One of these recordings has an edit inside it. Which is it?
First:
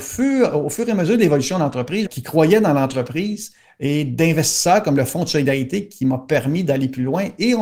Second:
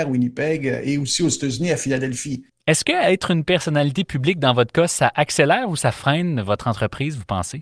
first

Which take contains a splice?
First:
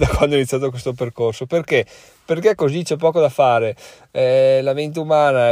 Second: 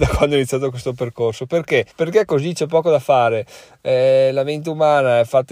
second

